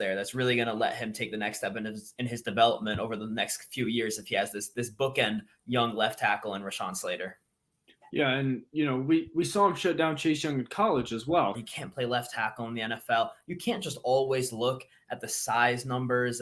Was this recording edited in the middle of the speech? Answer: yes; 1 cut; at 11.5 s

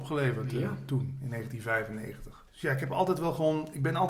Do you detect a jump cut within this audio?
yes; 1 cut; at 2.5 s

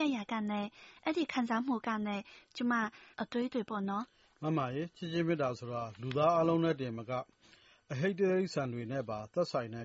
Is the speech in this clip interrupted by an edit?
yes; 1 cut; at 3.1 s

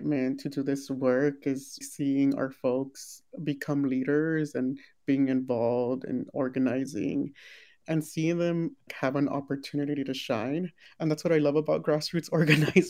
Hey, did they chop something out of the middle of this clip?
yes; 2 cuts; at 1.8 s, 8.9 s

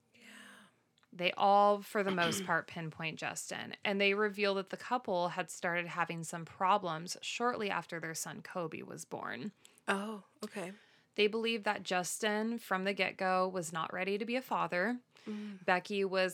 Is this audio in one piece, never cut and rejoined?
yes; 0 cuts

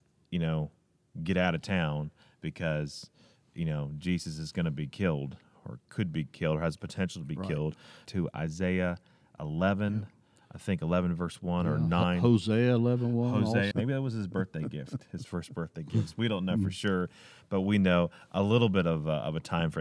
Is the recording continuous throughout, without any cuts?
no; 2 cuts; at 8.0 s, 13.7 s

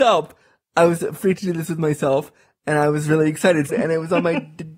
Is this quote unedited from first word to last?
no; 1 cut; at 3.7 s

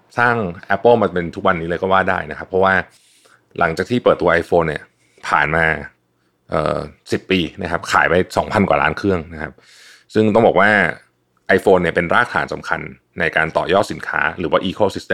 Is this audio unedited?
no; 1 cut; at 7.0 s

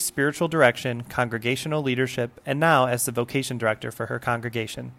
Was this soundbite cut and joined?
no; 0 cuts

